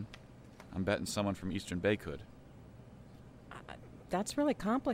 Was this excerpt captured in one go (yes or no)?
yes